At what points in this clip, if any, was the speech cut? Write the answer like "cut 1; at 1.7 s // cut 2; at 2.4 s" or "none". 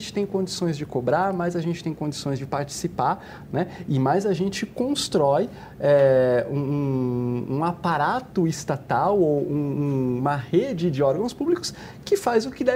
none